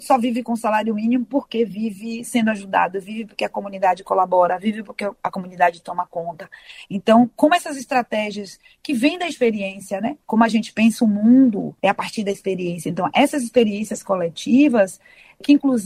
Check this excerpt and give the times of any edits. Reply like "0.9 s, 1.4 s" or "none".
none